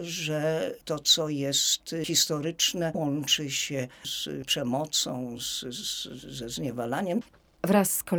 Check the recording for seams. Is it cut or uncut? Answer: uncut